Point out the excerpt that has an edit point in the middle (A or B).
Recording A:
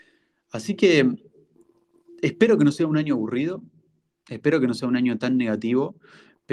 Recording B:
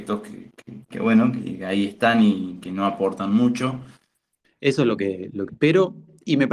B